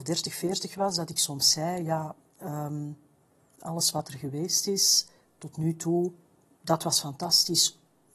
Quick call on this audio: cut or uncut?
uncut